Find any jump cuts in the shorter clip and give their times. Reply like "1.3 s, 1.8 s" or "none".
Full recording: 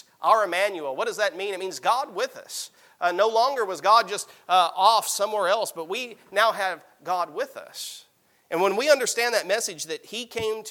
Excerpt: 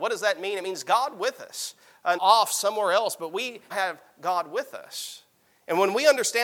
2.2 s, 3.7 s